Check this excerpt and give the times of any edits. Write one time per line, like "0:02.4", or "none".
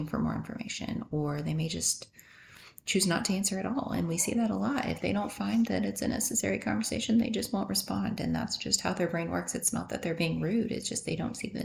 none